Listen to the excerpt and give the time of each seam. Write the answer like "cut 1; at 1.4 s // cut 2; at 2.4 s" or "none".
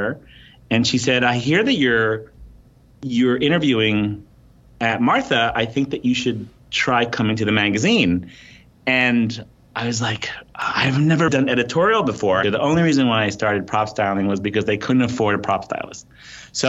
cut 1; at 11.3 s // cut 2; at 12.4 s